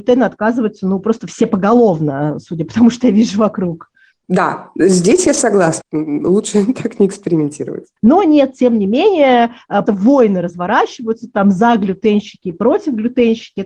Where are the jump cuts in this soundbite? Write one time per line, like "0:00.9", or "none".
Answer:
0:05.8
0:08.0
0:09.9